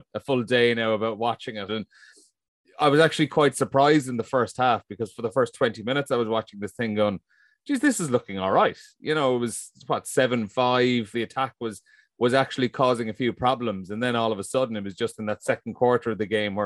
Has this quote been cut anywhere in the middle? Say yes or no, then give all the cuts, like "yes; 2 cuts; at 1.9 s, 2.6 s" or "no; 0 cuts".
yes; 2 cuts; at 1.7 s, 11.1 s